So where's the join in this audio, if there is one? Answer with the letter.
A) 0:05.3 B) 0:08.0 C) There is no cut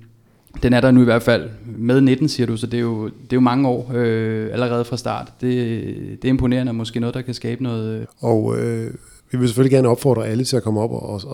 B